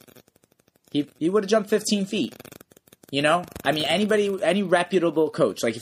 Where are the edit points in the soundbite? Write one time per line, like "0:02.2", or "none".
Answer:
none